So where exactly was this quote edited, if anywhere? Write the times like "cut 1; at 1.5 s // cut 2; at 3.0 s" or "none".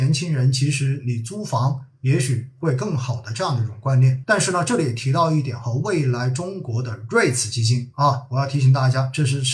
cut 1; at 4.2 s